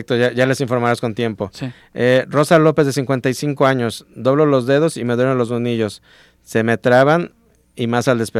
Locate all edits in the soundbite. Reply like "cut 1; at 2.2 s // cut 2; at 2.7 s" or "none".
none

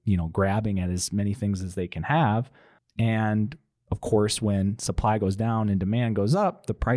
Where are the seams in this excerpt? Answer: none

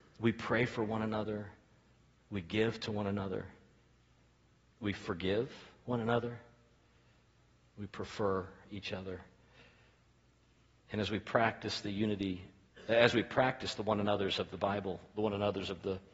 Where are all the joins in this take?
none

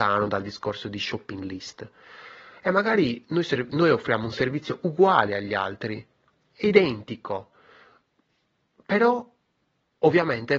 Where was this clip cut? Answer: none

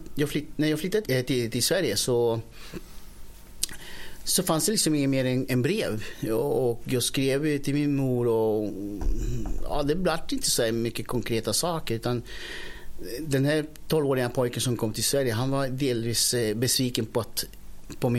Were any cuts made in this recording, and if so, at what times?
cut 1; at 1.0 s

